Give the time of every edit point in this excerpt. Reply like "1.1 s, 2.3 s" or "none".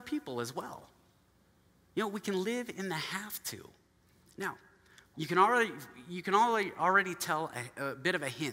5.1 s